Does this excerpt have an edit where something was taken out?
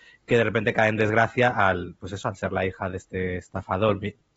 no; 0 cuts

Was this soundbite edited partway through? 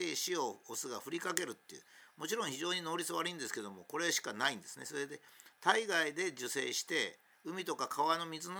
no; 0 cuts

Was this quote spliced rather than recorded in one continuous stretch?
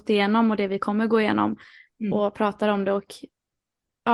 no; 0 cuts

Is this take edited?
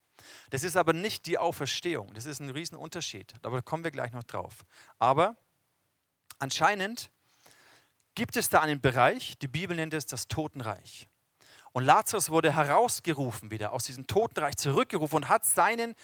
no; 0 cuts

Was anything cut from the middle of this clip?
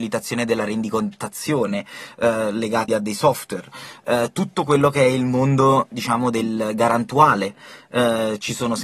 yes; 1 cut; at 2.9 s

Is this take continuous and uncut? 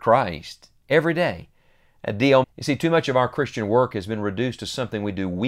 no; 1 cut; at 2.4 s

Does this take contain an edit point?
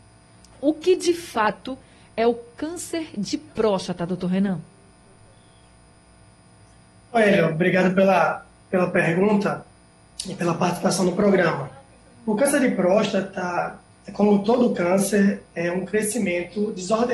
no; 0 cuts

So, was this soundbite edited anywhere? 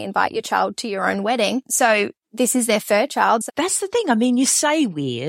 yes; 1 cut; at 3.5 s

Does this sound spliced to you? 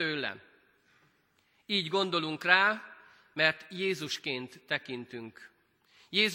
no; 0 cuts

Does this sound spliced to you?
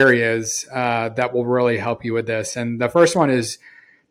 no; 0 cuts

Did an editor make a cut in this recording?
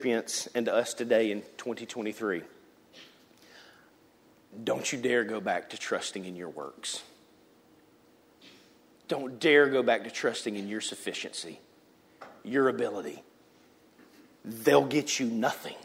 no; 0 cuts

